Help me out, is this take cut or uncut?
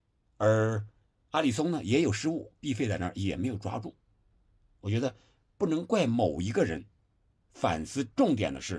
cut